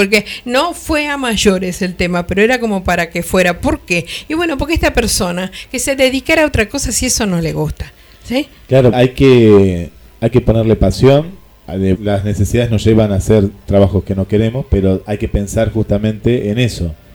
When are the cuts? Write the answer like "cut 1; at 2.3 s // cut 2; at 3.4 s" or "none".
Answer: cut 1; at 8.9 s // cut 2; at 12.0 s